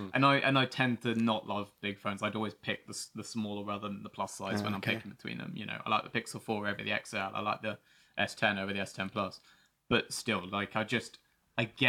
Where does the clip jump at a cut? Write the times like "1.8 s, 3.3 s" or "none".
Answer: none